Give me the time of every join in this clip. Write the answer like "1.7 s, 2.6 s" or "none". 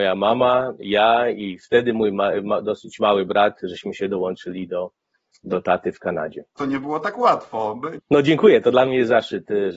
6.6 s, 8.0 s